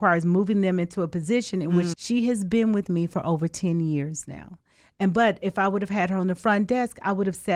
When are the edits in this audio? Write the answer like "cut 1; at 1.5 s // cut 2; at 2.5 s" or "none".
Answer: cut 1; at 1.9 s